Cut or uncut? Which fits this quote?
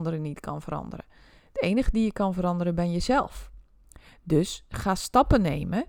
uncut